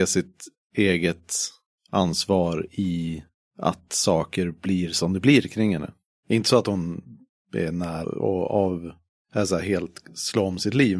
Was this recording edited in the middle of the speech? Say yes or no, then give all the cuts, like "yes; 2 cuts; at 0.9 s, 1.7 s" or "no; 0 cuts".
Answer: yes; 1 cut; at 8.0 s